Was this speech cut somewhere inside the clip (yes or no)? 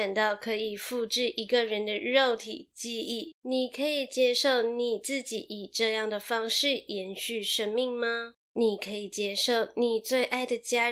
yes